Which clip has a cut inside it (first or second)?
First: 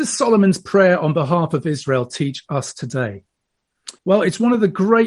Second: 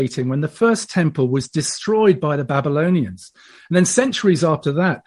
first